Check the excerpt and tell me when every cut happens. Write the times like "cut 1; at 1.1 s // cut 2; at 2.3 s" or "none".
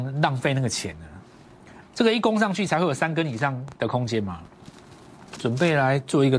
cut 1; at 1.8 s // cut 2; at 5.3 s